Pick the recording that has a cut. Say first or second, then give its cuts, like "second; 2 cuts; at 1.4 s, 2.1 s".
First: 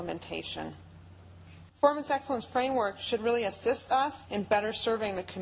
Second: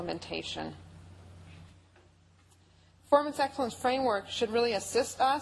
first; 2 cuts; at 1.7 s, 4.3 s